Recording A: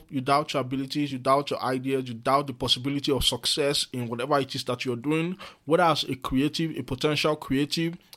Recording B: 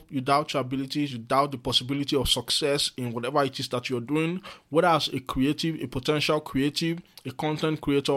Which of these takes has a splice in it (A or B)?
B